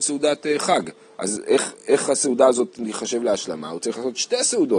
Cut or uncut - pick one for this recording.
uncut